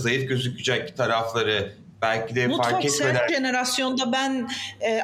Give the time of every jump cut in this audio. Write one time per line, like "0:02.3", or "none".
0:03.3